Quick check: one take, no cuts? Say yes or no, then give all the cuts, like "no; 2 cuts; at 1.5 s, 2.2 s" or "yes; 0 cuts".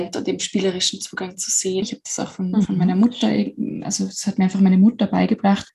no; 1 cut; at 1.8 s